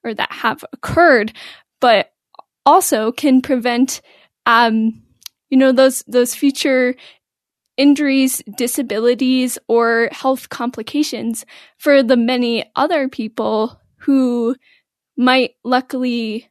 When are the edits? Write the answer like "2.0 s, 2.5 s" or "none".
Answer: none